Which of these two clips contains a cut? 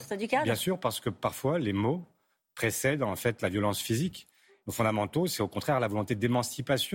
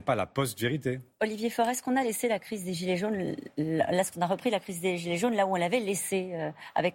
first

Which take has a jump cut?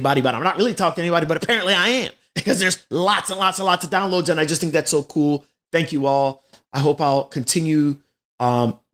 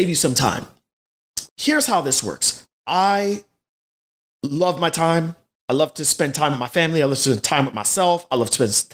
second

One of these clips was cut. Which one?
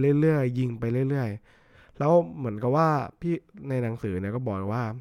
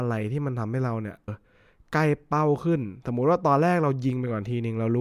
second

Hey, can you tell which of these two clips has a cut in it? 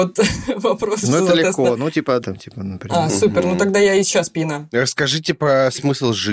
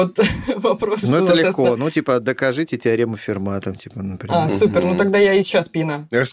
first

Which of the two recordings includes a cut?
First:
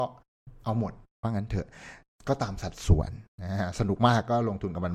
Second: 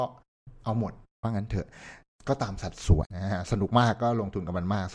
second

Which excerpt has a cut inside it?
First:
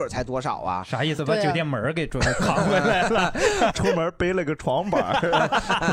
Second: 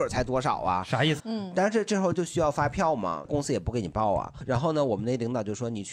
second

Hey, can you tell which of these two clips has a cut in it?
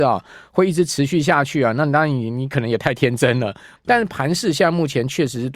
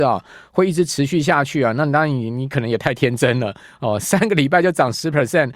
first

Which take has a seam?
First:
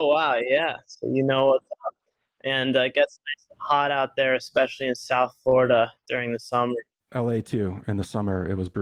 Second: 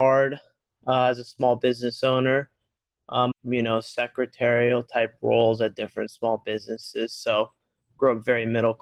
second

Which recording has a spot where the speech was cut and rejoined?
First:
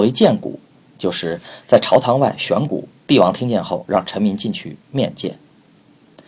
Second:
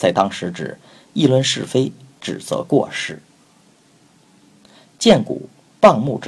first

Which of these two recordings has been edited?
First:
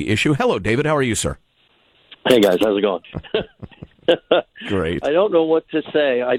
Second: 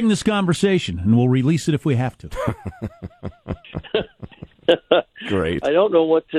first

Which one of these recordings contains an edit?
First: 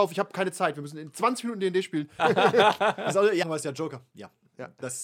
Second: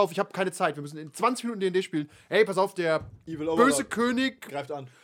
first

